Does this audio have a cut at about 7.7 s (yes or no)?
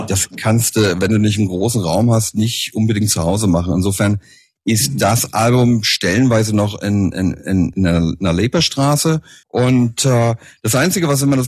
yes